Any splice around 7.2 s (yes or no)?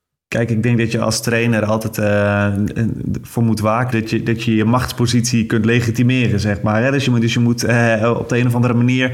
no